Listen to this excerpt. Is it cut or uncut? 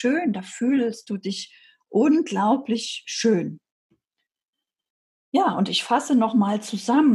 uncut